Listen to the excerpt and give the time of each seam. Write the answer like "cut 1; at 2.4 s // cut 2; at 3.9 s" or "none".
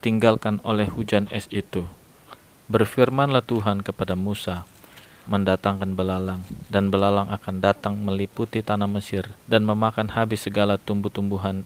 cut 1; at 2.6 s // cut 2; at 5.2 s // cut 3; at 9.4 s